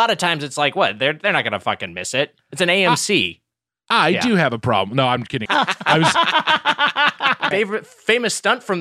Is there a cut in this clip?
yes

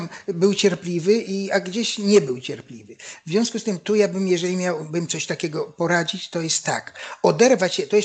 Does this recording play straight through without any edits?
yes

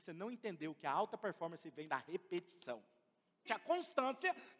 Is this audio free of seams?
no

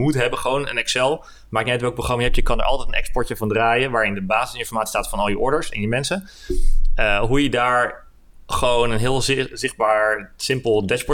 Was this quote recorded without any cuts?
yes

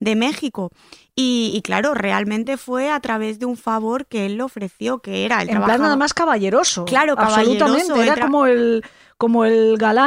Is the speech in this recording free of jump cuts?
yes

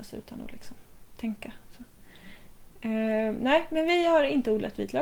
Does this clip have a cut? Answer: no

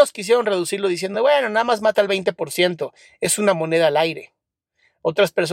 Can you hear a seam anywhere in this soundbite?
no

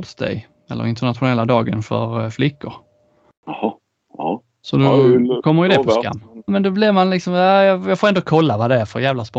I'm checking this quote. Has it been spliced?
yes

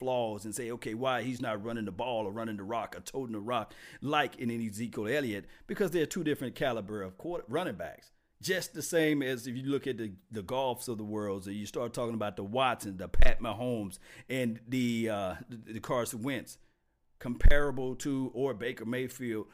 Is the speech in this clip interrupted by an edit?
no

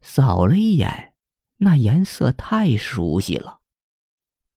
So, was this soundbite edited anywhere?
yes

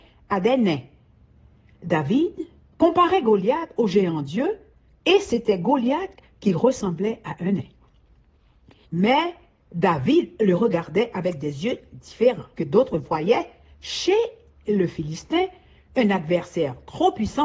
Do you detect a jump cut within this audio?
yes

